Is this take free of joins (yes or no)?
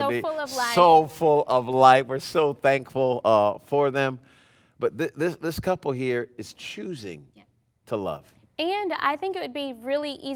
yes